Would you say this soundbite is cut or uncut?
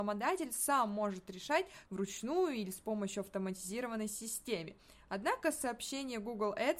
cut